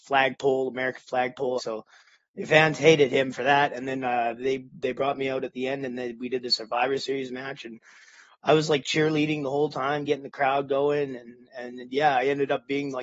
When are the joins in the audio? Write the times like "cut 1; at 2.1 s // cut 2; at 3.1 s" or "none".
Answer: cut 1; at 1.6 s